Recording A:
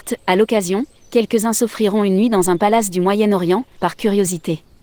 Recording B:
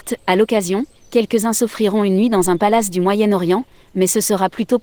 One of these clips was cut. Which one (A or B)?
A